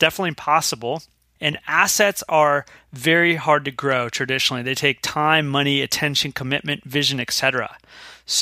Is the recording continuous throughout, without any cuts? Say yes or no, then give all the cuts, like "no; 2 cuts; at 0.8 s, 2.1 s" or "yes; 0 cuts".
no; 1 cut; at 1.4 s